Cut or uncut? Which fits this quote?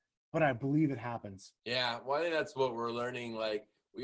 cut